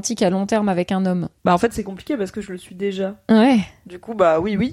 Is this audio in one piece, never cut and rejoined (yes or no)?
no